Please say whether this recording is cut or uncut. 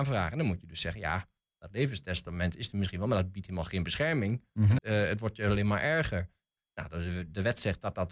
cut